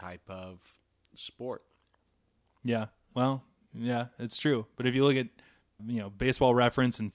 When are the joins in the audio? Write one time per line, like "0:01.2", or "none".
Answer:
0:05.8